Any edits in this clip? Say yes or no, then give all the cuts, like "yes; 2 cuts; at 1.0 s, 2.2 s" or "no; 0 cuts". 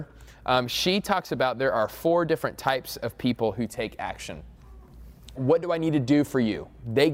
yes; 1 cut; at 5.4 s